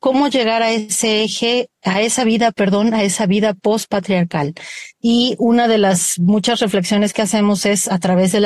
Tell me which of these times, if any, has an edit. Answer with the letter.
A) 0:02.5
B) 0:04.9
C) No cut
C